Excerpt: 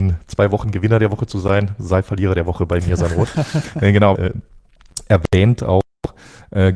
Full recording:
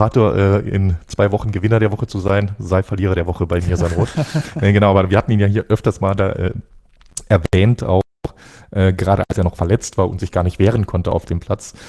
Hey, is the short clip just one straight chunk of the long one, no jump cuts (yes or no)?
no